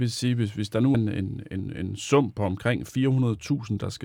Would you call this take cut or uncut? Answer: cut